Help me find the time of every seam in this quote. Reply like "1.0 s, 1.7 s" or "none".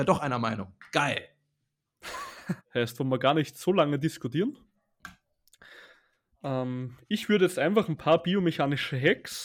2.6 s